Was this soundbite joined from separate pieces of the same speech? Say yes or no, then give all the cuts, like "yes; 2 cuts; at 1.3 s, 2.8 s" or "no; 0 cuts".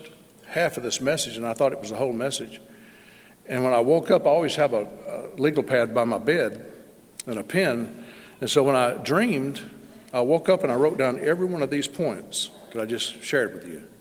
no; 0 cuts